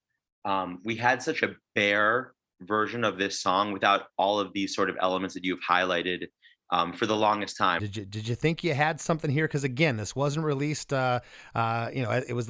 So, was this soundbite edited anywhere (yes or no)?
yes